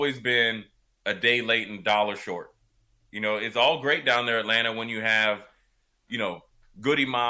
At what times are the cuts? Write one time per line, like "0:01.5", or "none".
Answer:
none